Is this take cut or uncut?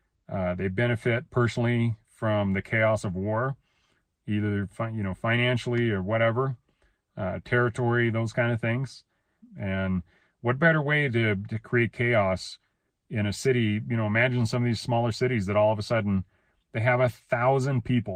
cut